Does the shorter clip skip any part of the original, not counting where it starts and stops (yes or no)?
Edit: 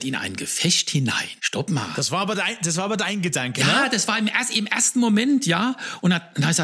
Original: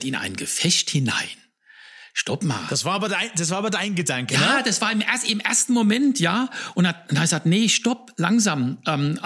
yes